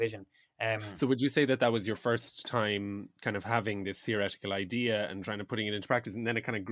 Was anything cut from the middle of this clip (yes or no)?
no